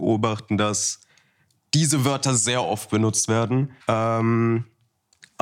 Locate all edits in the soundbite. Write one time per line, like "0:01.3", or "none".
0:03.8